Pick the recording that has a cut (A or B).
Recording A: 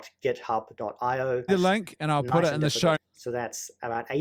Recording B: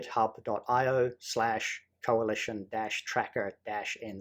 A